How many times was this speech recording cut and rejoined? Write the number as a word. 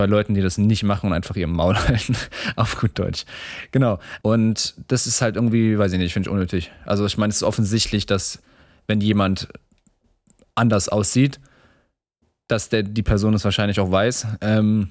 one